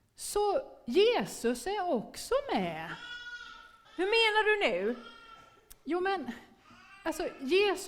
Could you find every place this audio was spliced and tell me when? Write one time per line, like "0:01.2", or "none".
0:03.8